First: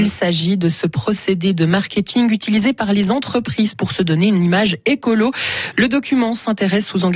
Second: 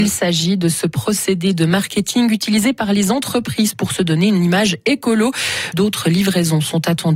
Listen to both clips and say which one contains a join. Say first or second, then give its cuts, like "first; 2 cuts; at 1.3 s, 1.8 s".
second; 1 cut; at 5.7 s